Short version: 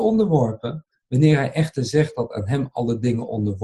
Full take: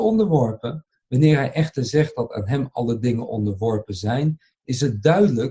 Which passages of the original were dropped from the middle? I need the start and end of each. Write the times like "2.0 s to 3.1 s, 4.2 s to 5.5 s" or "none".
none